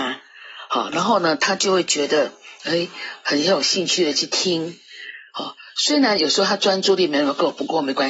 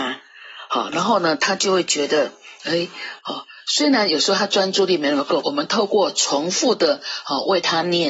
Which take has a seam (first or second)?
second